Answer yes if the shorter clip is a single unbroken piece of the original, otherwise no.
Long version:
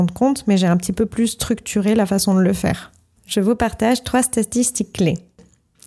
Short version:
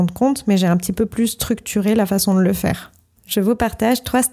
yes